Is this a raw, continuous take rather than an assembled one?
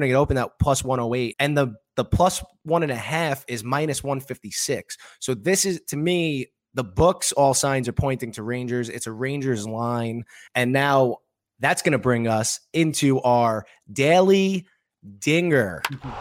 no; 2 cuts; at 1.3 s, 10.5 s

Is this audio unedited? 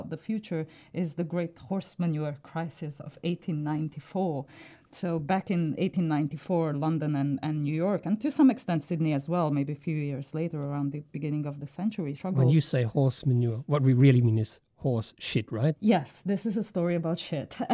yes; 0 cuts

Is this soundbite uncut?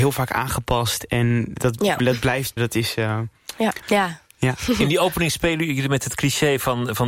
no; 2 cuts; at 2.6 s, 3.8 s

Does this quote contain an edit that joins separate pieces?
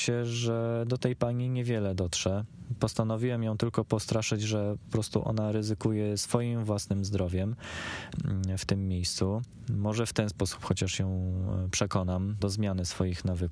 yes; 1 cut; at 12.4 s

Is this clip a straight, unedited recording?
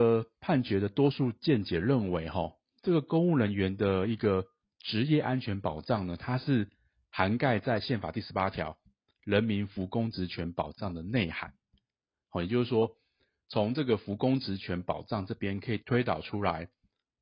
no; 1 cut; at 15.8 s

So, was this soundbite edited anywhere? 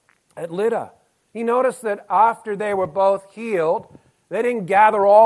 yes; 1 cut; at 1.2 s

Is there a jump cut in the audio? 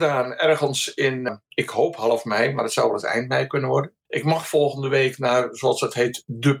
no; 0 cuts

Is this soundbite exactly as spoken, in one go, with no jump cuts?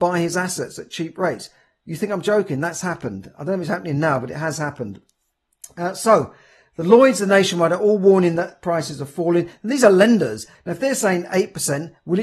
no; 1 cut; at 10.5 s

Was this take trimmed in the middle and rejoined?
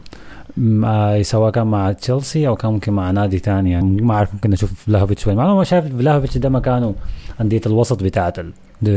yes; 1 cut; at 3.8 s

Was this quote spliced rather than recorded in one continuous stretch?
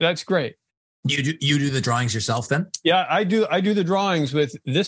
no; 0 cuts

